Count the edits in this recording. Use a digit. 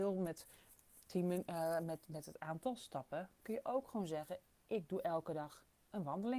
0